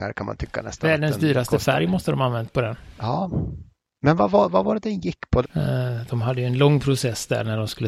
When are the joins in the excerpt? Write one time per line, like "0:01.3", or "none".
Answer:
0:05.4